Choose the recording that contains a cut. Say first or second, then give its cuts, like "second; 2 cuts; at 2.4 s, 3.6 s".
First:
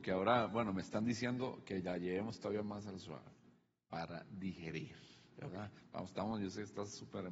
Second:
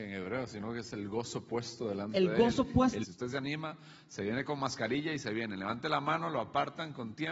second; 1 cut; at 3.0 s